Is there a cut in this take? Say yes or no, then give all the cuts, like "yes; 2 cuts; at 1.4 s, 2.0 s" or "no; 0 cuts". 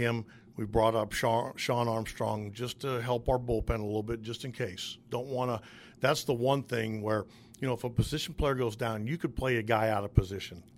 no; 0 cuts